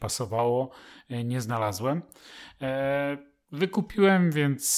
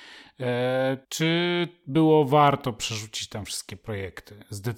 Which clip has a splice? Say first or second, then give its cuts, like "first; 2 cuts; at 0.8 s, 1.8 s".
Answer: second; 1 cut; at 1.0 s